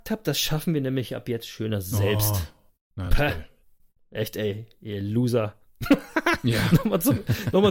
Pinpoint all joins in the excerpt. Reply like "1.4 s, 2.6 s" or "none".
none